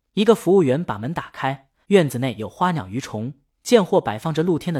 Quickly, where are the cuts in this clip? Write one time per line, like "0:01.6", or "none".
0:01.8
0:03.6